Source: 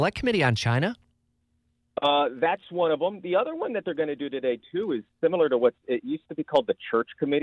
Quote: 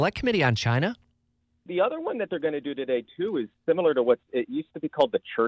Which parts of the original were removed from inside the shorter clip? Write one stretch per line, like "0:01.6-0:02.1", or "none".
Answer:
0:01.7-0:03.2